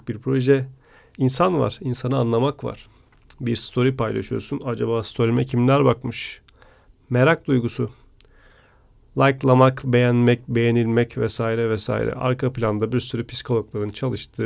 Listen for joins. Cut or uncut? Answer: cut